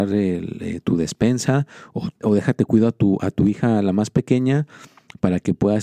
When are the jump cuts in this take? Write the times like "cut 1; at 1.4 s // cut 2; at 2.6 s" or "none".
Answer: cut 1; at 2.2 s